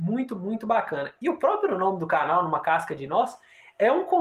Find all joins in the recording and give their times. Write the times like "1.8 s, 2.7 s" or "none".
none